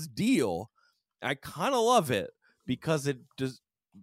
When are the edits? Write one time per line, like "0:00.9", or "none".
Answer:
none